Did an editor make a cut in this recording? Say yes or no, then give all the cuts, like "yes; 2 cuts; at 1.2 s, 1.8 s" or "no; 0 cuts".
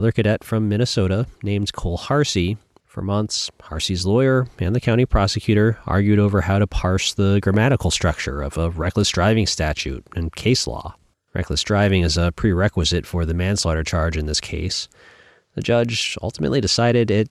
yes; 1 cut; at 2.8 s